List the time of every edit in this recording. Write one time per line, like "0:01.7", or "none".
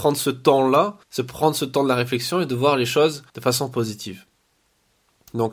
0:01.0
0:03.3